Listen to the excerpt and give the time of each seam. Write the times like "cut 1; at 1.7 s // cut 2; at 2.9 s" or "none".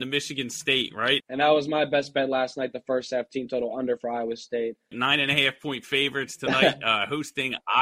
cut 1; at 1.2 s // cut 2; at 4.9 s

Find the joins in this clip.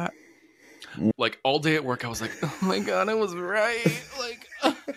cut 1; at 1.1 s

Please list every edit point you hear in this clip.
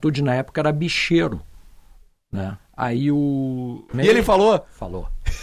cut 1; at 2.6 s // cut 2; at 3.9 s

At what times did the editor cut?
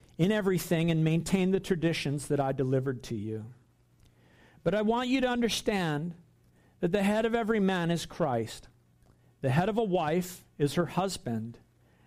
none

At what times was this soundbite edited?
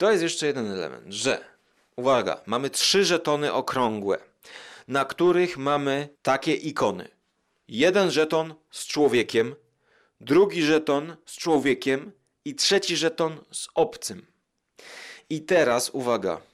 cut 1; at 6.1 s

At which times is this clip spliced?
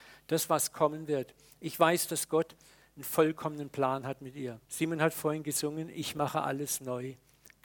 cut 1; at 4.6 s

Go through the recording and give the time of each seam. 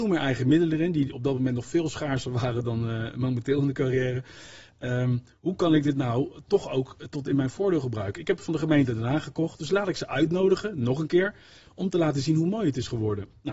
none

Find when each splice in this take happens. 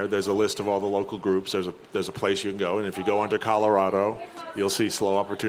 none

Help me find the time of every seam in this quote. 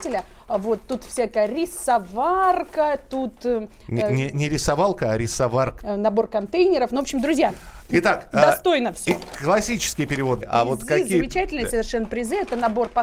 cut 1; at 5.8 s // cut 2; at 9.3 s // cut 3; at 10.4 s

